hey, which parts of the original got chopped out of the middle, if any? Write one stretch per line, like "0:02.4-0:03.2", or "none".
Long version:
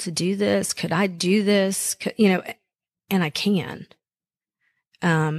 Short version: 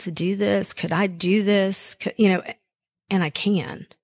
none

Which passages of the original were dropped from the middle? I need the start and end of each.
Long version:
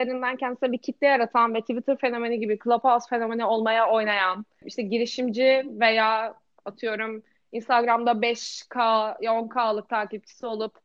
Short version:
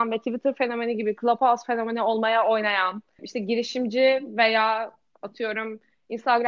none

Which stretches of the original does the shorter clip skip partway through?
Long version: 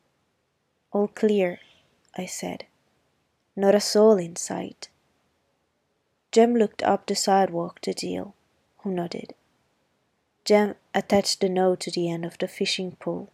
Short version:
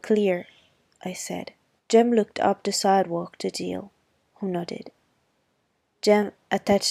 0:02.9-0:06.2

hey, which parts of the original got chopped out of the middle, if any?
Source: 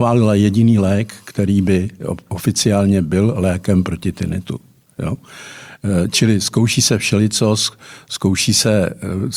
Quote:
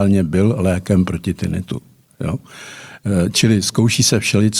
none

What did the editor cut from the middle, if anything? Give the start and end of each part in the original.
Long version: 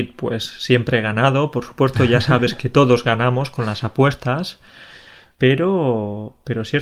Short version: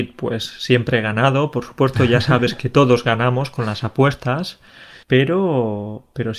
0:05.0-0:05.3

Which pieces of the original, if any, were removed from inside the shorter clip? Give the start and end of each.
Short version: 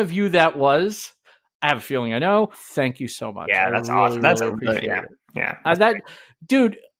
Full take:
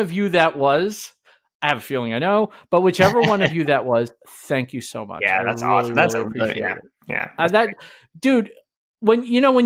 0:02.5-0:04.3

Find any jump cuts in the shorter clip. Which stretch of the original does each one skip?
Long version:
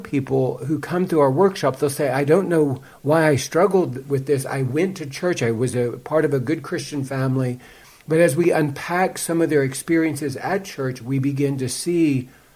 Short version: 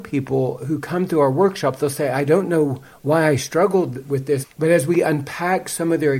0:04.4-0:07.9

